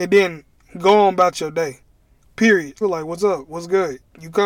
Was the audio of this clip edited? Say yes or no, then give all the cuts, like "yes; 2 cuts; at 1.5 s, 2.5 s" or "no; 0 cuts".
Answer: yes; 1 cut; at 2.8 s